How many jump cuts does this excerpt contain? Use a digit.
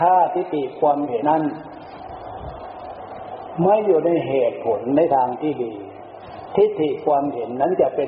1